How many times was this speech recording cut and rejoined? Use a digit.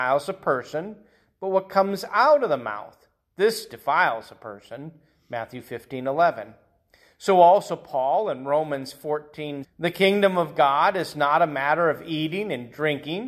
1